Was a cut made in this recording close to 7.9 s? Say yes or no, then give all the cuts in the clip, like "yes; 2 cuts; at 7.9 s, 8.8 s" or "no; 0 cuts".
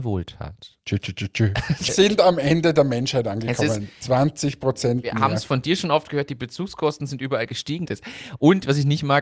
yes; 2 cuts; at 1.9 s, 7.9 s